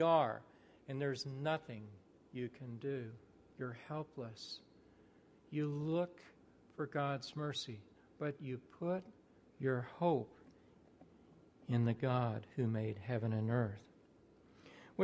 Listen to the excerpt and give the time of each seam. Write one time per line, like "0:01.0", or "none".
none